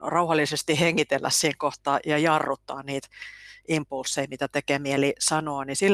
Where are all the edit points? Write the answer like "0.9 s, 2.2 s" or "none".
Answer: none